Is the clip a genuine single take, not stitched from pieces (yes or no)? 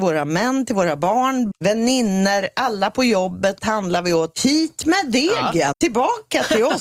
no